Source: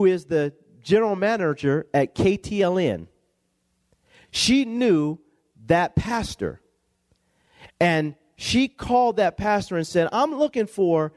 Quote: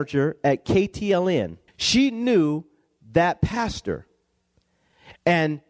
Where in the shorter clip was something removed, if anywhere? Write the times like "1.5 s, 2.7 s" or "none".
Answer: 1.7 s

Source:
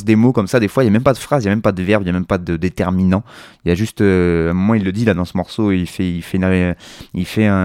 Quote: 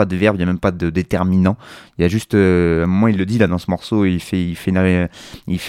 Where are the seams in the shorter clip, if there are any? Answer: none

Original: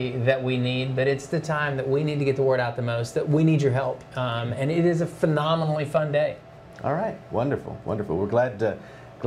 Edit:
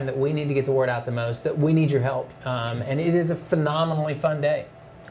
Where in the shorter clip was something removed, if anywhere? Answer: none

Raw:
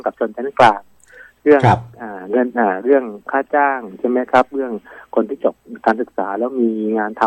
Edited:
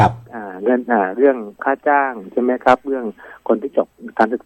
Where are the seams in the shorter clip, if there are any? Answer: none

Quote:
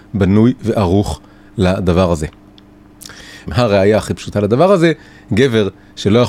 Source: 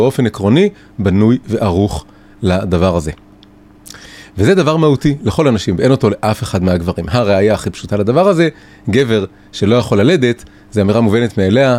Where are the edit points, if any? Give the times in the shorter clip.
3.5 s

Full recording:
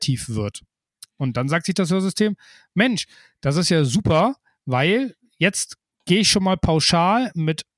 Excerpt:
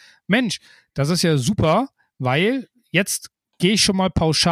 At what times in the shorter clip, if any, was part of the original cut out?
none

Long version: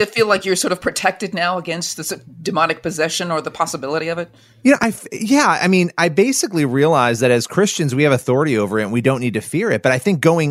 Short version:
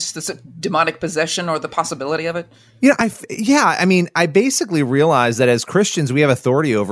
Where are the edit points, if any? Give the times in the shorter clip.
none

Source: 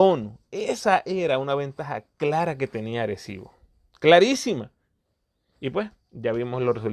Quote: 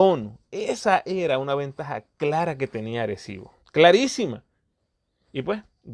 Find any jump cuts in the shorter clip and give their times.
3.6 s

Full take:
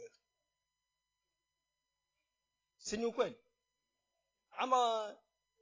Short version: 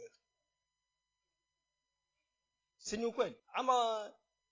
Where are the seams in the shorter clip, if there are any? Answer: 3.4 s

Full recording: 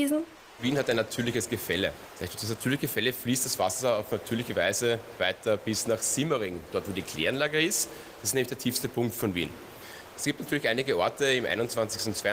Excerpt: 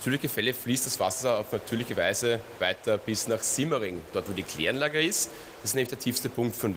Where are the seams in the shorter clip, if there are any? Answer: none

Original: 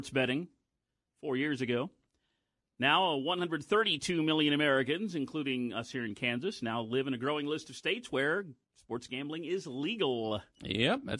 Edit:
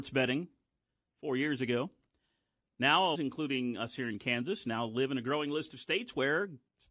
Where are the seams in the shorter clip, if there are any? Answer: 3.1 s

